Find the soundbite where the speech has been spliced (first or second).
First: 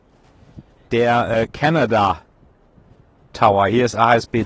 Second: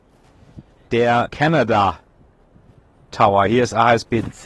second